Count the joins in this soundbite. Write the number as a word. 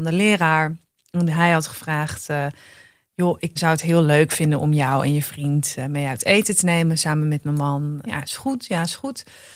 two